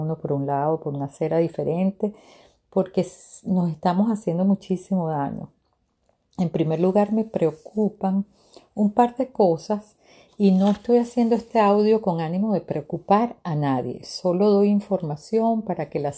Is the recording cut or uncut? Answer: uncut